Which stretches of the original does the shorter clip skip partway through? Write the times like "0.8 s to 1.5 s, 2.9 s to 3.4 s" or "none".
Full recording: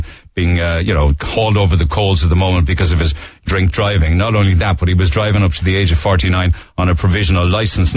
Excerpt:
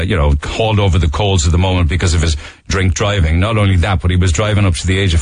none